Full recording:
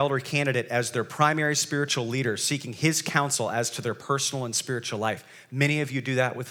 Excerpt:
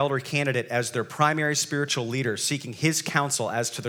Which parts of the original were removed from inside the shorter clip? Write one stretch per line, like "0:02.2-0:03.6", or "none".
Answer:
none